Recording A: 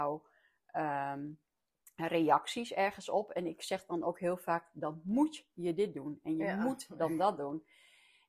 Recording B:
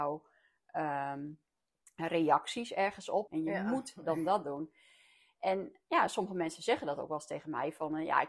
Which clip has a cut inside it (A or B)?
B